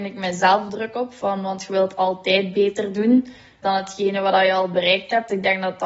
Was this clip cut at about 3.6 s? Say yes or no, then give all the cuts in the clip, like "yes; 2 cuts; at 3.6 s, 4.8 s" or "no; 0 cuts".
yes; 1 cut; at 3.6 s